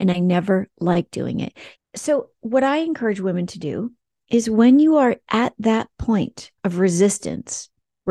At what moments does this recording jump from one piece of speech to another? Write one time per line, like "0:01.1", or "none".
0:01.8
0:06.6